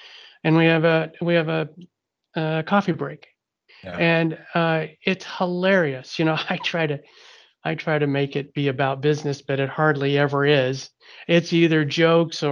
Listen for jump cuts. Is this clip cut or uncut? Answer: uncut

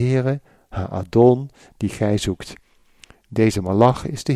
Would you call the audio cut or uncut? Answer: uncut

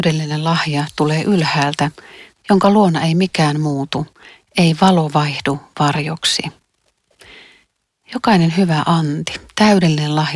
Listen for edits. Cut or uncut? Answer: cut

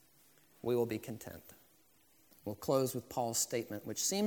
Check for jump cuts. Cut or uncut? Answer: cut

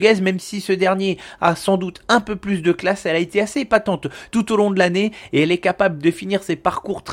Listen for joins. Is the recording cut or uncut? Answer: uncut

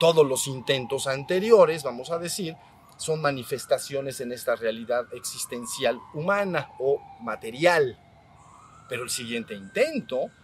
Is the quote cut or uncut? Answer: uncut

